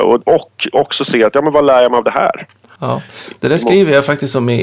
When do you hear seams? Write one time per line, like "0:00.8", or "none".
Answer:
0:02.8